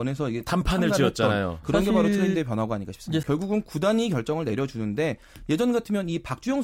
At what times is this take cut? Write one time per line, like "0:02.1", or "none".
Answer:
0:01.6
0:03.2